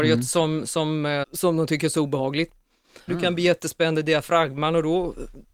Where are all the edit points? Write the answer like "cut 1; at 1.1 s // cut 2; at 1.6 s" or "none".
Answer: cut 1; at 1.2 s // cut 2; at 3.1 s